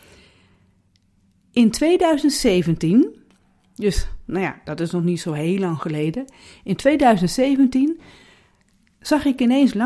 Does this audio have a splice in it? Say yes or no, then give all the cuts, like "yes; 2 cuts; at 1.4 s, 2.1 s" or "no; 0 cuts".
no; 0 cuts